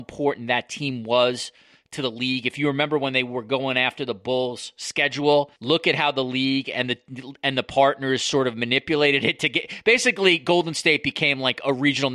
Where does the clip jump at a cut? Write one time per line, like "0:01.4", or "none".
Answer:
0:05.6